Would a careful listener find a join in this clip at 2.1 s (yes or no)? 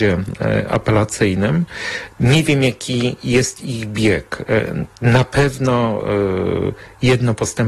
yes